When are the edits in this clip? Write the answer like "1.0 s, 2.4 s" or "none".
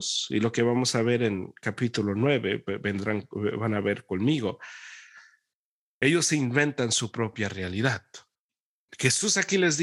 none